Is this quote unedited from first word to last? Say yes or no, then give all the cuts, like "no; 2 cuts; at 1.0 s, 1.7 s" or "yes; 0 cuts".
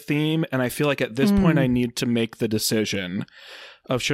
yes; 0 cuts